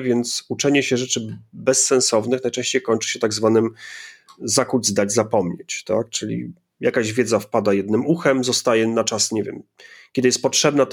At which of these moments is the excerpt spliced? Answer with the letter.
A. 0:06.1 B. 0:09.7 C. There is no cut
C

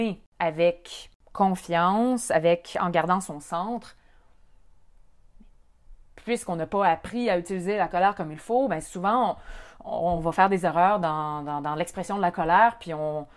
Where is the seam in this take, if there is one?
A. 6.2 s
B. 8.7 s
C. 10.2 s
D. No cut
D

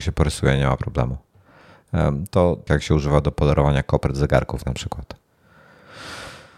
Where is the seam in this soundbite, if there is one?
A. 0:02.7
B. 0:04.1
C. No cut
A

